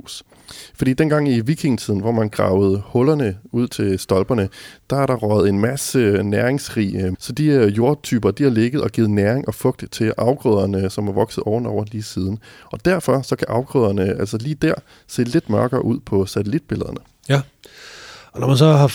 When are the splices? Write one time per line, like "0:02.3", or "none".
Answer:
0:07.1